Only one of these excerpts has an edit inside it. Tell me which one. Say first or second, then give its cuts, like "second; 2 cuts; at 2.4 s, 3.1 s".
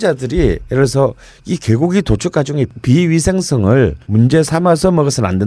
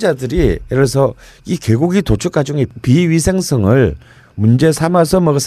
first; 1 cut; at 4.0 s